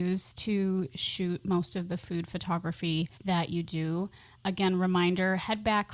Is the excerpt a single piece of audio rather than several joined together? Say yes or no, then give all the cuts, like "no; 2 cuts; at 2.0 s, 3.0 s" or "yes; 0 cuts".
no; 1 cut; at 3.1 s